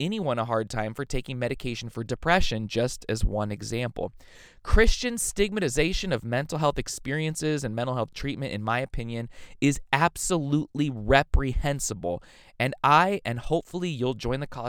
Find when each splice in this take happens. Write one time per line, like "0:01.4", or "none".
none